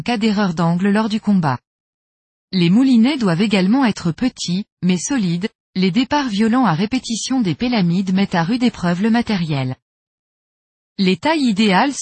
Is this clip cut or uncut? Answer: cut